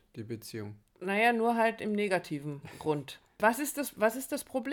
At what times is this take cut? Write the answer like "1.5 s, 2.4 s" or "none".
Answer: 3.4 s